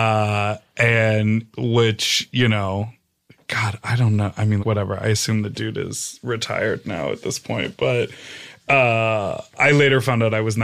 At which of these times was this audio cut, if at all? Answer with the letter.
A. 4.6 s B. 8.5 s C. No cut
A